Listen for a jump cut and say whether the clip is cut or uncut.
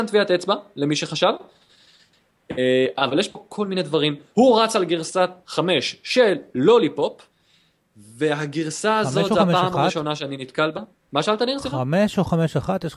uncut